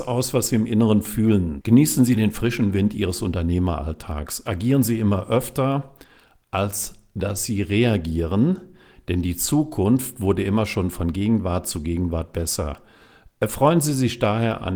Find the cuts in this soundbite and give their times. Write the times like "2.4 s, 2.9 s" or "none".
1.6 s